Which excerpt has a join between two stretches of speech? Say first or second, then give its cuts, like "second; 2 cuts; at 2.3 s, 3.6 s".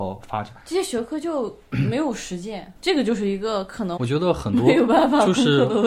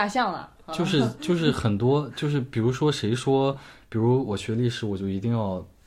first; 2 cuts; at 2.7 s, 4.0 s